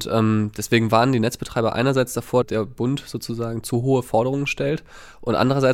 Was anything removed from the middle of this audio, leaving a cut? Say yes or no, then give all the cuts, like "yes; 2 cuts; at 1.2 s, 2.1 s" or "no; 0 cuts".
yes; 1 cut; at 2.4 s